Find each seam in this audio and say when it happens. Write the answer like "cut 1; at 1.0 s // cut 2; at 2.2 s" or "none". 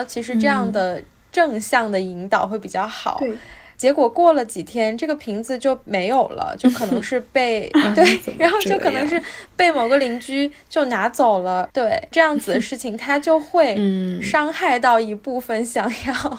none